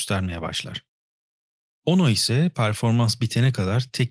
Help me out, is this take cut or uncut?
uncut